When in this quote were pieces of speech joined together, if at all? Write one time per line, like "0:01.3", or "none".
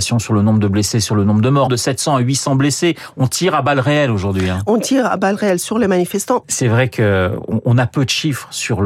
0:01.7
0:06.4